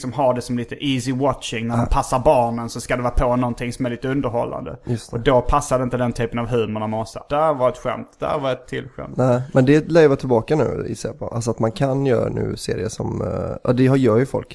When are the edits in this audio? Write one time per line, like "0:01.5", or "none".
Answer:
0:07.3